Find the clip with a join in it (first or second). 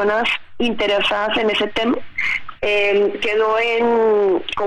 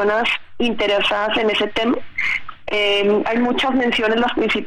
first